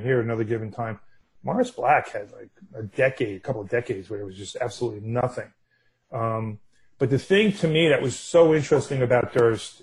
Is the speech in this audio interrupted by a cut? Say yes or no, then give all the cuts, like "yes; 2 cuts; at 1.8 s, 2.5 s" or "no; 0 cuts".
no; 0 cuts